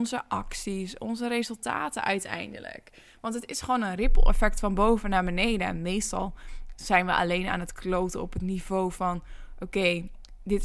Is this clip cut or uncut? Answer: uncut